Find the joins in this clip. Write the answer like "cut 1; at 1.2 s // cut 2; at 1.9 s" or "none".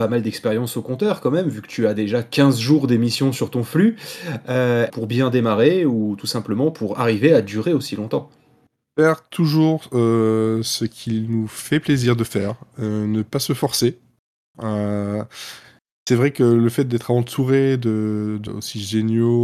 cut 1; at 4.9 s // cut 2; at 18.5 s

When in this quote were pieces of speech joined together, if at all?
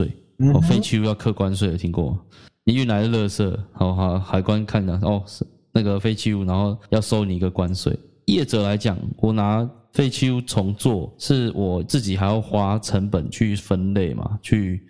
none

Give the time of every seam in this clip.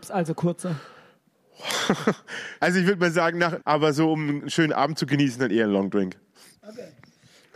cut 1; at 2.6 s // cut 2; at 3.6 s

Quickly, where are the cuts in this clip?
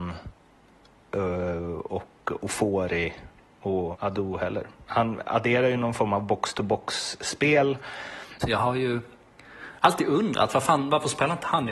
cut 1; at 3.9 s // cut 2; at 8.4 s

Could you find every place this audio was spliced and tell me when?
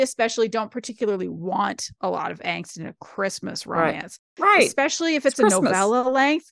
none

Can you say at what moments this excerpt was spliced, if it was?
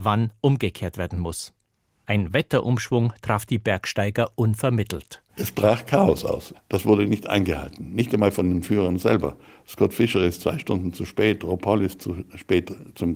cut 1; at 2.0 s // cut 2; at 5.3 s // cut 3; at 6.5 s

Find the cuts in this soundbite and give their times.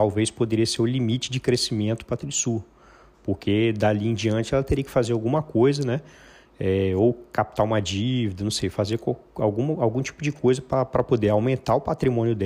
none

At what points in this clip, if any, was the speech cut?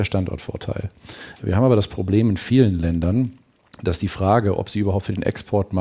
cut 1; at 1.4 s

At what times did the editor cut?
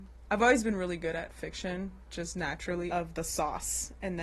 cut 1; at 2.9 s

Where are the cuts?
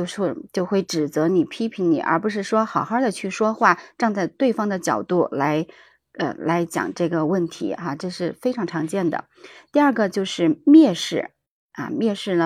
none

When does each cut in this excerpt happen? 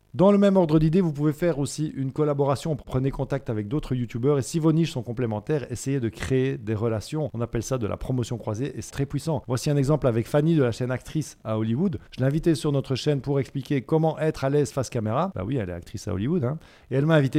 cut 1; at 8.9 s

